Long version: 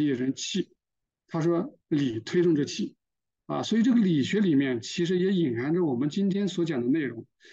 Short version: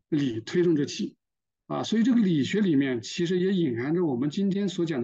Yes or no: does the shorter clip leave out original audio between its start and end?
no